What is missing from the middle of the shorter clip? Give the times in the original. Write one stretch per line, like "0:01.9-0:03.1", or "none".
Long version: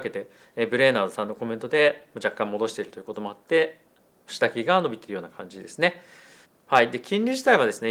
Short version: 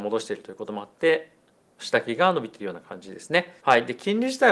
0:06.1-0:06.6